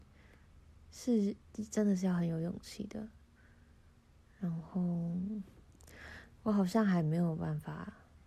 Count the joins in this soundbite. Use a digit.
0